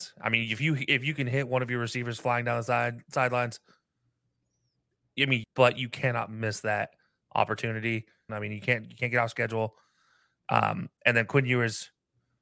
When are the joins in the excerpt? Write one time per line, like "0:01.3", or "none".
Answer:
0:05.4
0:08.3